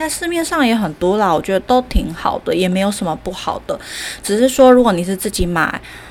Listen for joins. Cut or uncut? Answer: cut